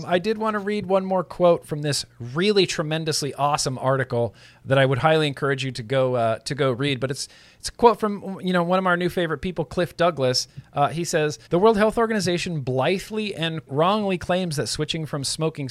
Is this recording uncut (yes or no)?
no